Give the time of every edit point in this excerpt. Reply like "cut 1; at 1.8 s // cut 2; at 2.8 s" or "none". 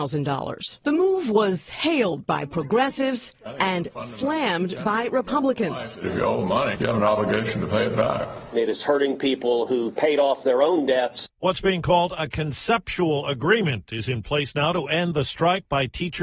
cut 1; at 6.7 s